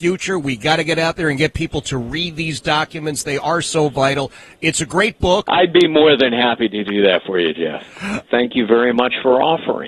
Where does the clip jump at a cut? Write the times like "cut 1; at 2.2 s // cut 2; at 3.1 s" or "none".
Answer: cut 1; at 5.4 s // cut 2; at 8.3 s